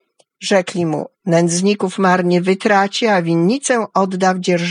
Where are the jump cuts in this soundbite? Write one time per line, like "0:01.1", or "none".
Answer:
none

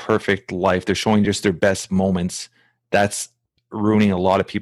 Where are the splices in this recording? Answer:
none

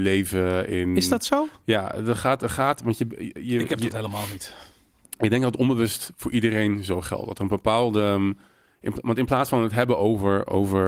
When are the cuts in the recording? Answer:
none

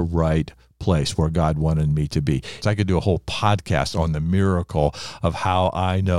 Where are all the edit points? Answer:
0:02.6

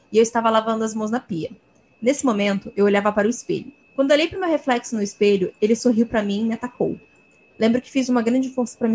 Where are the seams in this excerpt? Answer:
0:03.8
0:07.5

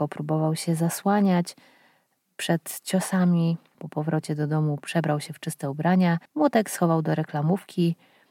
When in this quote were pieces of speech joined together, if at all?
0:03.7
0:06.3

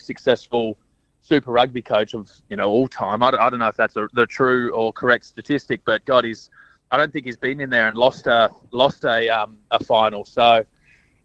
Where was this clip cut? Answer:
none

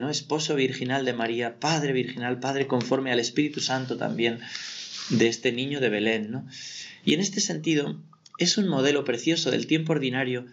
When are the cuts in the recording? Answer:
0:07.0

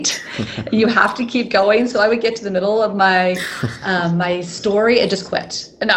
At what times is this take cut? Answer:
none

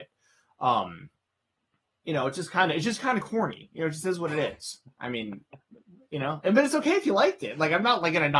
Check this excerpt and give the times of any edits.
none

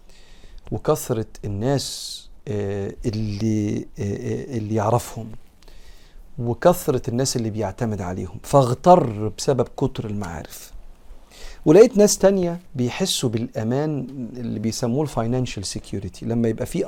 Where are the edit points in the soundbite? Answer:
0:12.7

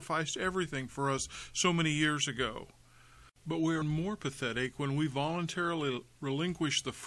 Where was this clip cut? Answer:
0:03.8

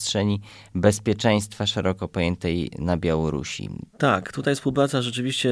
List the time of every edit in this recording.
0:03.9

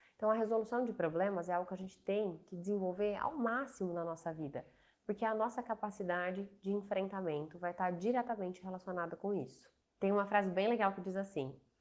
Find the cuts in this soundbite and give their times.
none

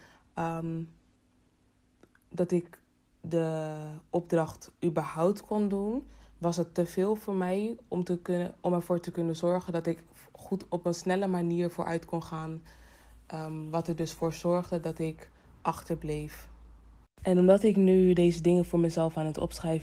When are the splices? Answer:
none

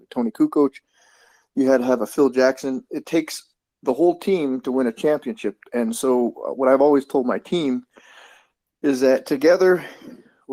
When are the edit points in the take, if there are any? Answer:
none

